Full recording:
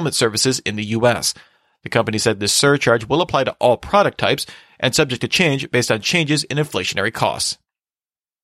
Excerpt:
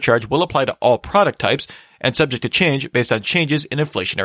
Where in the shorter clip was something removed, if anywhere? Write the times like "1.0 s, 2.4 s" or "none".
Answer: none